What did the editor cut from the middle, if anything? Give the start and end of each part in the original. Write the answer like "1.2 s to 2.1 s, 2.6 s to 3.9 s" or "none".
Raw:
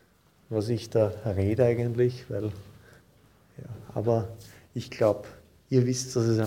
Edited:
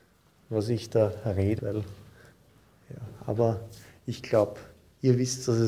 1.6 s to 2.3 s